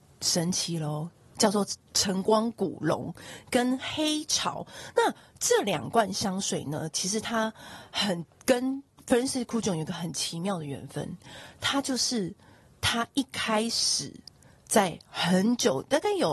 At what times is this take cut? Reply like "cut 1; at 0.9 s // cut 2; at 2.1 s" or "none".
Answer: none

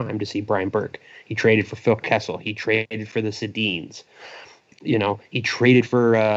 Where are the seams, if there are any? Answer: none

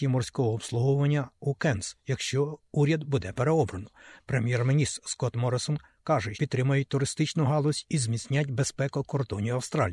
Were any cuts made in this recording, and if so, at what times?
cut 1; at 4.2 s // cut 2; at 6.3 s

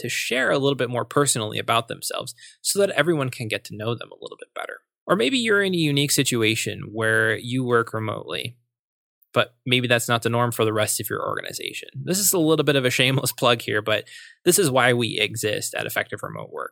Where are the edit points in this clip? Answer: none

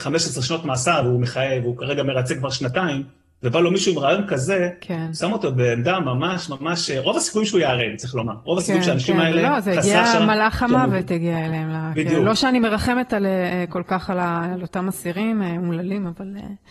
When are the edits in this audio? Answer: none

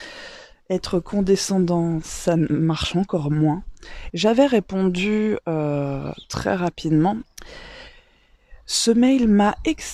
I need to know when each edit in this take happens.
cut 1; at 4.1 s // cut 2; at 7.2 s

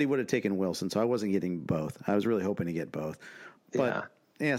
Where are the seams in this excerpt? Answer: cut 1; at 3.6 s

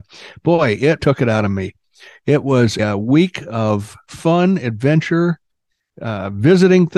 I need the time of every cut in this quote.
cut 1; at 1.0 s // cut 2; at 2.8 s

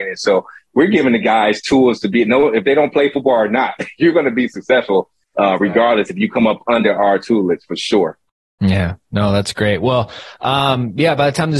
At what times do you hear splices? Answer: none

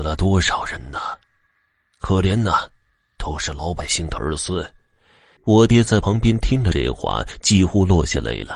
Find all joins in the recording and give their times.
cut 1; at 5.4 s

